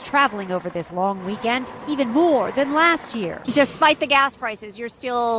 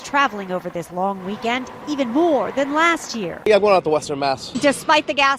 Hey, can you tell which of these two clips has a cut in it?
first; 1 cut; at 3.4 s

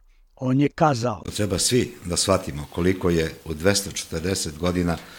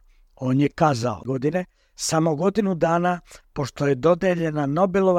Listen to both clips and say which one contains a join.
second; 1 cut; at 1.2 s

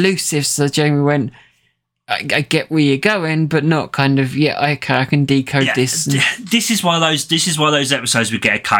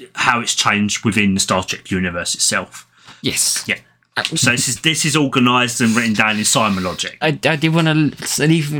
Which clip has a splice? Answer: second; 3 cuts; at 3.2 s, 4.3 s, 7.2 s

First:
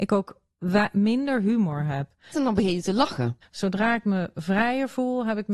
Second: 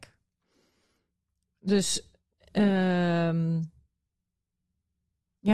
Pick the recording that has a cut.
first; 2 cuts; at 2.3 s, 3.4 s

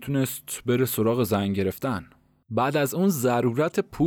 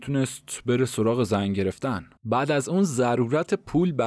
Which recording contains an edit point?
second; 1 cut; at 2.2 s

